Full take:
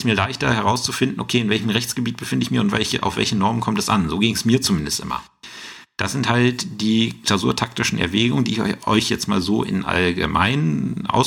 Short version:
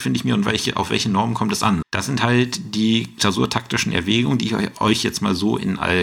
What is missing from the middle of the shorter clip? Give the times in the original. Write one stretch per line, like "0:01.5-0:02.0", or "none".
0:04.1-0:05.9